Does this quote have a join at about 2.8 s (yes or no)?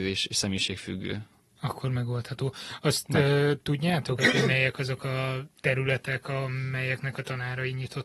no